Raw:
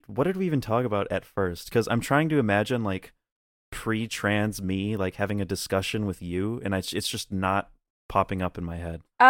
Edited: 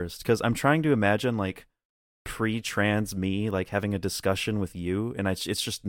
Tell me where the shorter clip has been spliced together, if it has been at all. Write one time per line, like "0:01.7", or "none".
none